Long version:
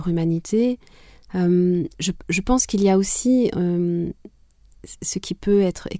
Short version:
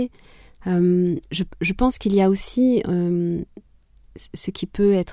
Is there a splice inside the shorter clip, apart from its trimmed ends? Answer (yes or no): no